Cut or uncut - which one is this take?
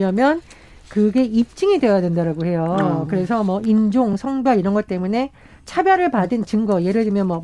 uncut